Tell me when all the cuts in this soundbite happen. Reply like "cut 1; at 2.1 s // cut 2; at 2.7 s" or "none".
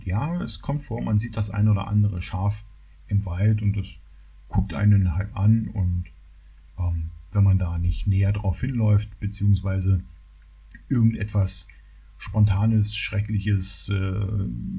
none